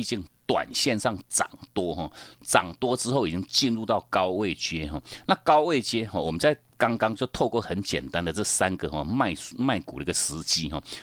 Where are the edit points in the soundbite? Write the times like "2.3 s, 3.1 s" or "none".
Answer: none